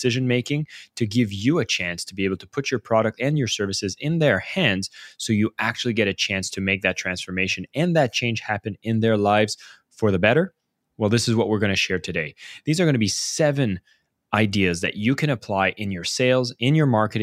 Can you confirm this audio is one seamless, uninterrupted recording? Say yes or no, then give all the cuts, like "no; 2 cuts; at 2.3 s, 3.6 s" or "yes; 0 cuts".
yes; 0 cuts